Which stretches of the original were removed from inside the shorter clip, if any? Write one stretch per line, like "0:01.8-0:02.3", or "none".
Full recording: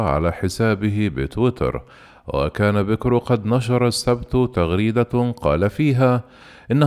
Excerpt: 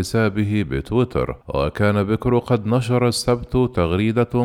0:01.9-0:02.2